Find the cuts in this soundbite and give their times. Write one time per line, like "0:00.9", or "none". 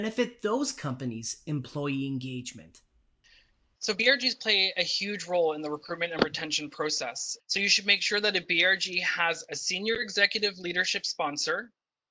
0:07.4